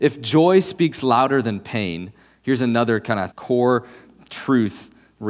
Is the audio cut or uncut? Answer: cut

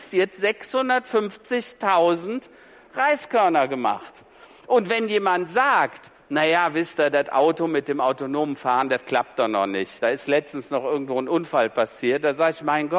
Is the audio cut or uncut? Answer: uncut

